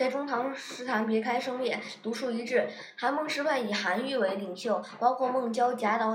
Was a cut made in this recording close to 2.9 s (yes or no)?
no